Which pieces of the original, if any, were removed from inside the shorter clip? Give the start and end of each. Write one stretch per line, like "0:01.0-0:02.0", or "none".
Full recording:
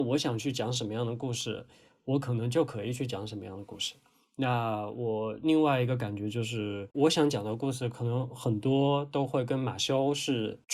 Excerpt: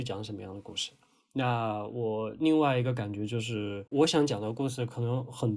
none